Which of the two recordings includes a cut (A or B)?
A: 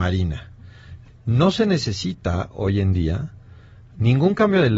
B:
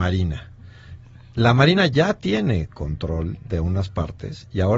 A